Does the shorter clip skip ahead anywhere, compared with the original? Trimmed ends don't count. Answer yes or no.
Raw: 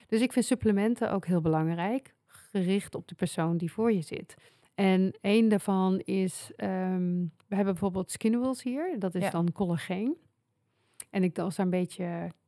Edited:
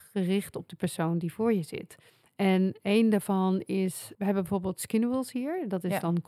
yes